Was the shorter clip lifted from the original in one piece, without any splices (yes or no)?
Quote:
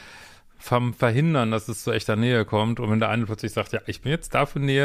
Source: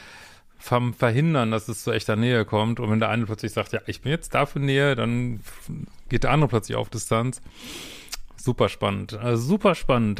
yes